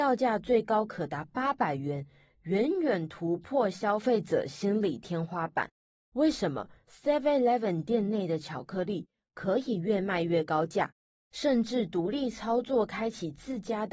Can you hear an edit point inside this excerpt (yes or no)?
no